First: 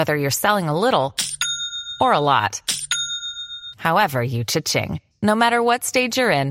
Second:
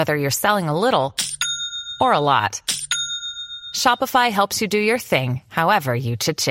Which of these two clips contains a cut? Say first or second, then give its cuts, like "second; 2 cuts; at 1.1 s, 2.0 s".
first; 2 cuts; at 3.7 s, 5.1 s